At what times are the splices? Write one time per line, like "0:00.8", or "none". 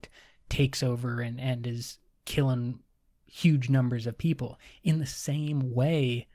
none